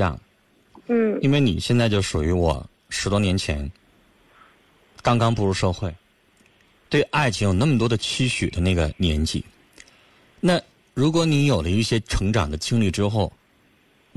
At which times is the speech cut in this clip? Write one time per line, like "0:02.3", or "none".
none